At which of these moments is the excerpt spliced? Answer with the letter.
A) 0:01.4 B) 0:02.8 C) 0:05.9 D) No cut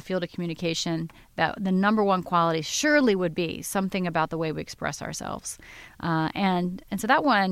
D